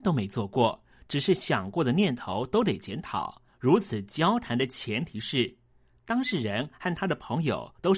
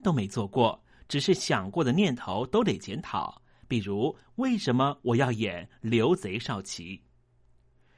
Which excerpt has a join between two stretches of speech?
first; 1 cut; at 3.5 s

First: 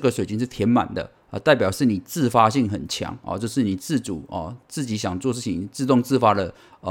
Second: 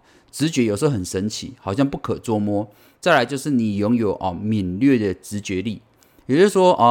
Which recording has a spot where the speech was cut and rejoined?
second; 1 cut; at 3.0 s

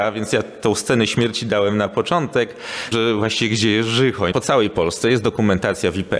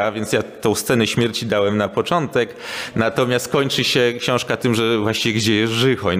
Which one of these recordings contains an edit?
first; 2 cuts; at 2.9 s, 4.3 s

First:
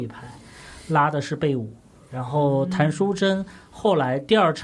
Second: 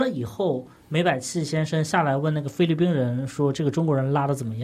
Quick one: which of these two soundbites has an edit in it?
first; 1 cut; at 2.1 s

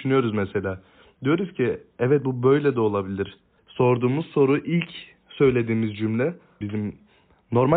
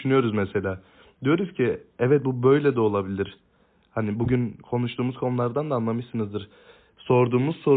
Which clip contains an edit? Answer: first; 2 cuts; at 3.6 s, 6.6 s

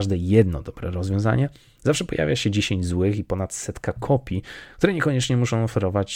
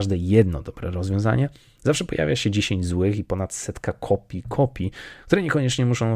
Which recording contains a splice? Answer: first; 1 cut; at 3.9 s

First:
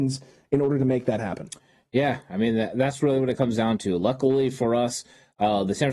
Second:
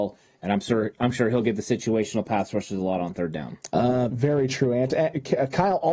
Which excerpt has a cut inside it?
second; 1 cut; at 4.1 s

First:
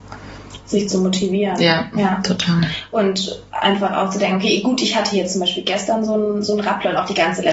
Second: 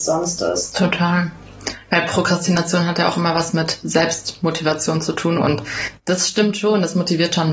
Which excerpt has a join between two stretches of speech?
second; 1 cut; at 5.4 s

